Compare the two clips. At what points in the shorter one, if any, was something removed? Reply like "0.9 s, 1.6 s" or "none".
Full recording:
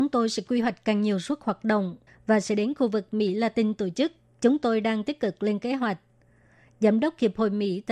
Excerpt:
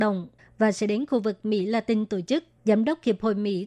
2.6 s